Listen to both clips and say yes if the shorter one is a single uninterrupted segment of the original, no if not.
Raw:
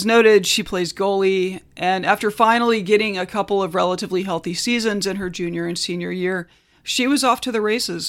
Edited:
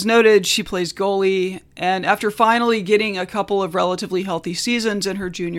yes